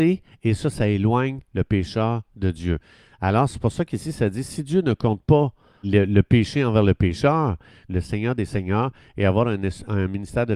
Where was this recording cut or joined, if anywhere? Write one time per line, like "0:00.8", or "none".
0:05.8
0:07.9